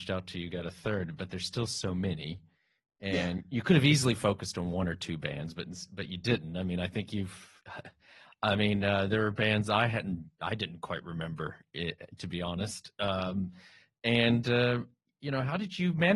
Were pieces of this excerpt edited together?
no; 0 cuts

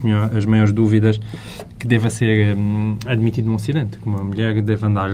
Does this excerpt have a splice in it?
no; 0 cuts

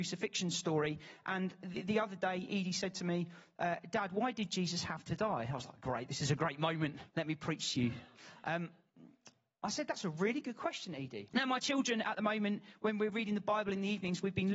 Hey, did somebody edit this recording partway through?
yes; 2 cuts; at 7.1 s, 11.3 s

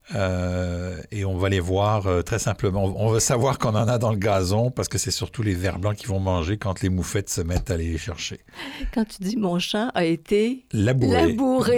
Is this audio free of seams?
yes; 0 cuts

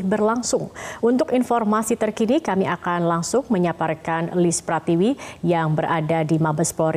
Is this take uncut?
yes; 0 cuts

